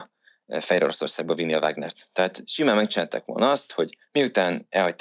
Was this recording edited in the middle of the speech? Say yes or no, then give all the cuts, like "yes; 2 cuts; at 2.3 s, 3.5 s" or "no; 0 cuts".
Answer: no; 0 cuts